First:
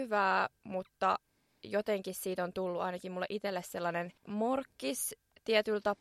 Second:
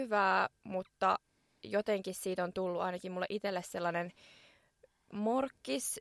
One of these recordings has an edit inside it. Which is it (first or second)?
first